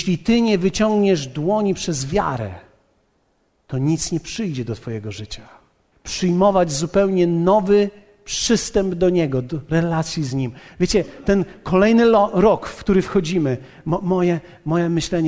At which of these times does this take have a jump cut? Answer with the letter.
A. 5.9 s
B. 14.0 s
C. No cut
A